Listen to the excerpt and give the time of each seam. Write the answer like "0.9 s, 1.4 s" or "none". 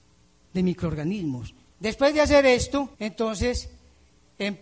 1.7 s, 2.9 s